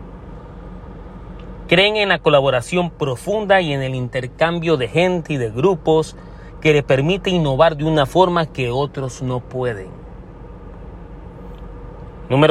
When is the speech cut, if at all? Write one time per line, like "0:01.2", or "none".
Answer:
0:01.6